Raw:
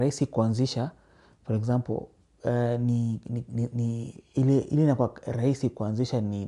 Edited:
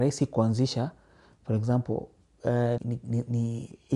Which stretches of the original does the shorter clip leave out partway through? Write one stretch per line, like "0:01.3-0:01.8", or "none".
0:02.8-0:03.2